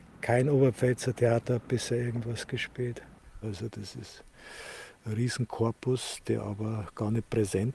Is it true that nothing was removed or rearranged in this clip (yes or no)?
no